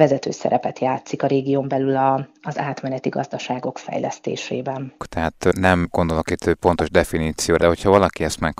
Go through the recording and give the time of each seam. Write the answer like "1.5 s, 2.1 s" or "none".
5.0 s, 7.6 s